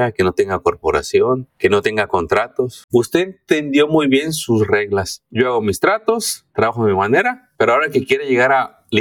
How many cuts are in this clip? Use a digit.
1